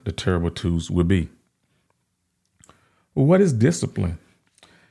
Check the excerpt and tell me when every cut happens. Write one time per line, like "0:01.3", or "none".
none